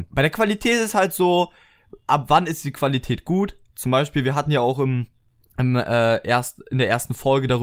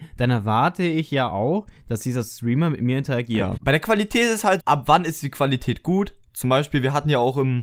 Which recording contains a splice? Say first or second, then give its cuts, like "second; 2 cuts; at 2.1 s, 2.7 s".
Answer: second; 2 cuts; at 3.6 s, 4.6 s